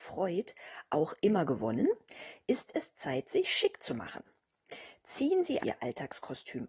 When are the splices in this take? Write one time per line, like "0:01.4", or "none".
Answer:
0:05.6